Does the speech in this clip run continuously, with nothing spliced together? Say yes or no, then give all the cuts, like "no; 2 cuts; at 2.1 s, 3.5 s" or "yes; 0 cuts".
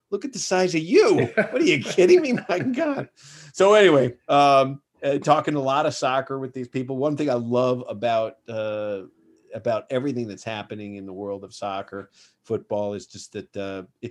yes; 0 cuts